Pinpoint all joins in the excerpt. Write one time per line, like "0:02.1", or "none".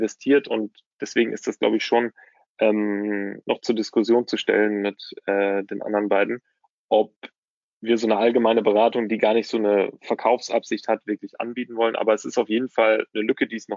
none